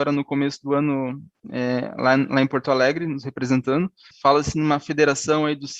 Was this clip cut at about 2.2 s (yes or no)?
no